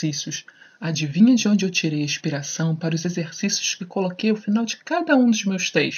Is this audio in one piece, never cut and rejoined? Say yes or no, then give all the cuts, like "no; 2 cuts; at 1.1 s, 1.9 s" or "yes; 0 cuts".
yes; 0 cuts